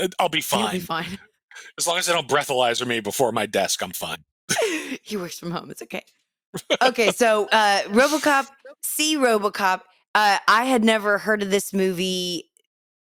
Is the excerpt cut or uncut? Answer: uncut